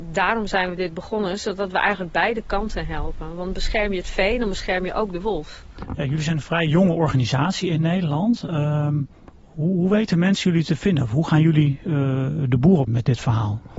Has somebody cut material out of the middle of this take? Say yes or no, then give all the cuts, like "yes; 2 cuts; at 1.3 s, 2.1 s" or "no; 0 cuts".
yes; 1 cut; at 12.9 s